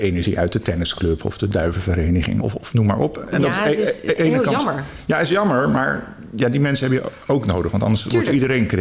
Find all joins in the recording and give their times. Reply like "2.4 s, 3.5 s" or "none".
2.4 s